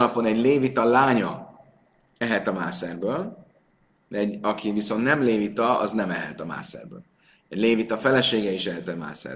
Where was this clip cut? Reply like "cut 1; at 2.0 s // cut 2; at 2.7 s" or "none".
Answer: none